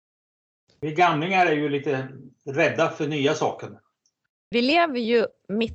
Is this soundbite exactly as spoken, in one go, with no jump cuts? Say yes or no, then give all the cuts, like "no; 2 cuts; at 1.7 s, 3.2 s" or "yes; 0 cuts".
no; 1 cut; at 4.5 s